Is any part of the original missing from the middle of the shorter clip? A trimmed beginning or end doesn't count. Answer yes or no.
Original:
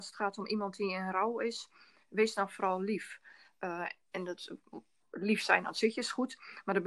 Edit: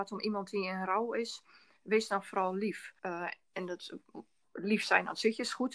yes